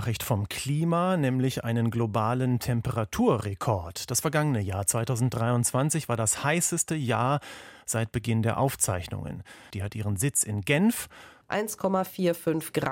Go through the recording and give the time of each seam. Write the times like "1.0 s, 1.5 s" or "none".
9.7 s, 11.4 s